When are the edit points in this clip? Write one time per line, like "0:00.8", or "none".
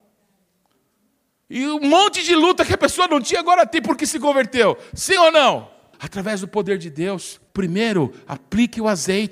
0:05.9
0:07.5